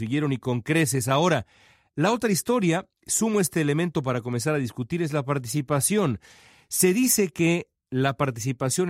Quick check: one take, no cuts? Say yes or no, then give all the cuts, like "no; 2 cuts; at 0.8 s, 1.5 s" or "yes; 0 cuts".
yes; 0 cuts